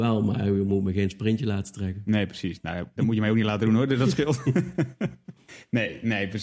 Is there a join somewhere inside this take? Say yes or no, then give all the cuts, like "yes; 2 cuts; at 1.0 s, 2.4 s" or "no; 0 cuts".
yes; 1 cut; at 3.0 s